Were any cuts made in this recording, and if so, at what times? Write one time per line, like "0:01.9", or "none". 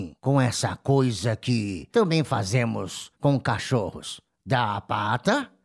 none